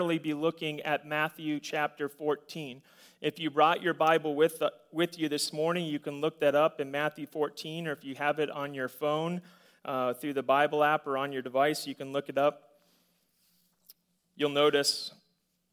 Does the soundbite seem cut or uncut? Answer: uncut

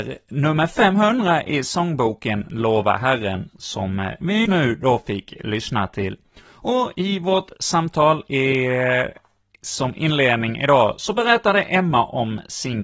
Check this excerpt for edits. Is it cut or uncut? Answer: cut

